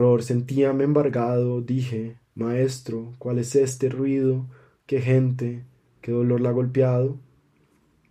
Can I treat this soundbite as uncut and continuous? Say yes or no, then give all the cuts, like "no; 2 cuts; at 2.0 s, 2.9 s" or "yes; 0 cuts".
yes; 0 cuts